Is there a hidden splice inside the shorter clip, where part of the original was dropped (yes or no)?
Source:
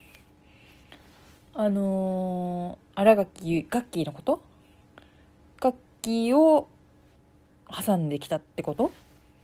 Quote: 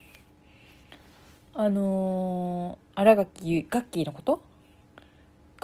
no